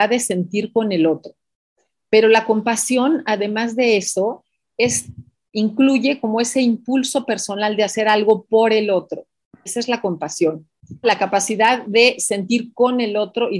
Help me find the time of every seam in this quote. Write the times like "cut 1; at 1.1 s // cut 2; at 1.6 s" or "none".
cut 1; at 9.7 s // cut 2; at 11.0 s